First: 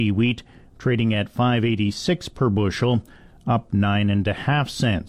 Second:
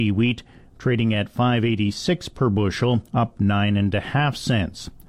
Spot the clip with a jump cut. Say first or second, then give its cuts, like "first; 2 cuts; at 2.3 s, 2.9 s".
second; 1 cut; at 3.1 s